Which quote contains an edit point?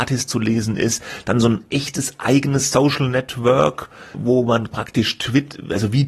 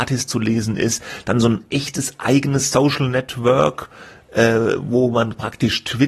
first; 1 cut; at 4.1 s

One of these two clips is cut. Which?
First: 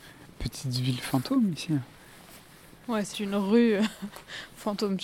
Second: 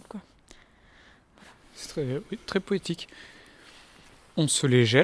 first; 1 cut; at 3.1 s

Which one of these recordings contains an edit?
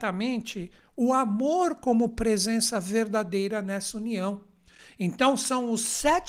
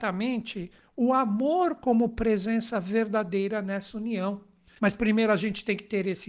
second; 1 cut; at 4.8 s

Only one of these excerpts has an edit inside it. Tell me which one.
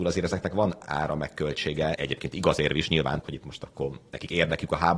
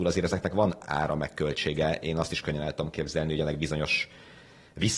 first; 2 cuts; at 2.0 s, 3.2 s

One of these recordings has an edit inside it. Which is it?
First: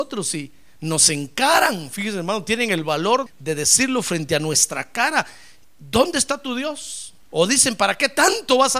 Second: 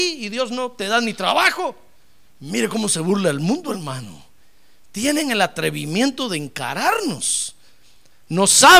first; 2 cuts; at 3.3 s, 7.2 s

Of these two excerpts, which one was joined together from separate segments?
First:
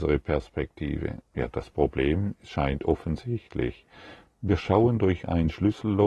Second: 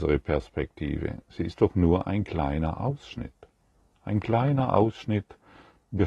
first; 2 cuts; at 1.2 s, 4.2 s

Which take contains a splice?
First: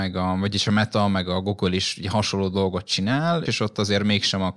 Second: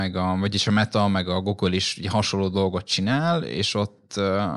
first; 1 cut; at 3.5 s

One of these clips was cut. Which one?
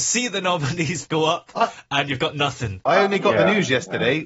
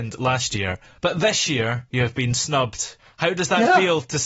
first; 1 cut; at 2.9 s

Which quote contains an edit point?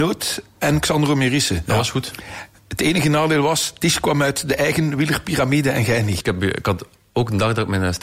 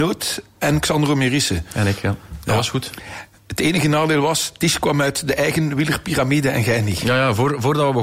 first; 2 cuts; at 1.7 s, 6.2 s

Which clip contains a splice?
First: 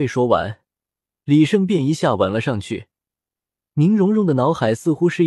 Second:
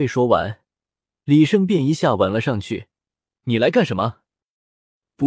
second; 1 cut; at 3.4 s

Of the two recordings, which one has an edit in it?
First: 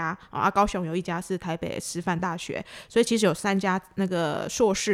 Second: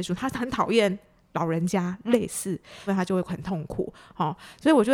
second; 1 cut; at 2.9 s

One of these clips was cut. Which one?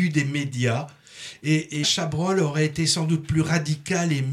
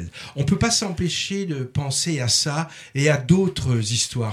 first; 1 cut; at 1.8 s

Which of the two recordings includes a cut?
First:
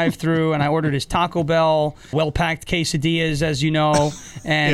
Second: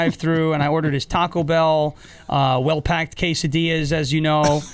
first; 1 cut; at 2.1 s

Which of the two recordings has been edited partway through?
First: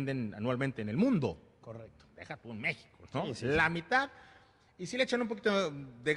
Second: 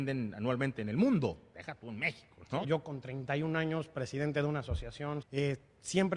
second; 3 cuts; at 1.5 s, 2.6 s, 5.2 s

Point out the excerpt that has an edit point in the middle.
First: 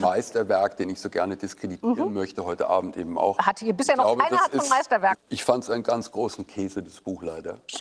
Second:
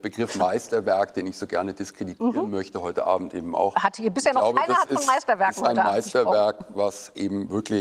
first; 1 cut; at 5.1 s

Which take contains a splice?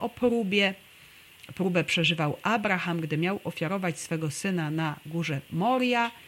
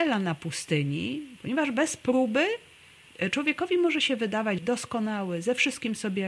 second; 2 cuts; at 1.4 s, 4.6 s

